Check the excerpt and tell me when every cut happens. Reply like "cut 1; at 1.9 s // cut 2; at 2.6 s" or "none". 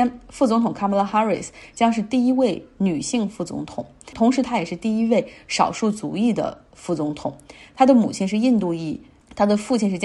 none